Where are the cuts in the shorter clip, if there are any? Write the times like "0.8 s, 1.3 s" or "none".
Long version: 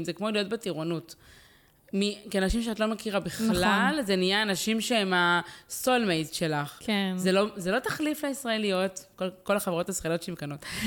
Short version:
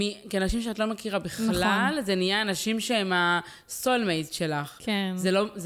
none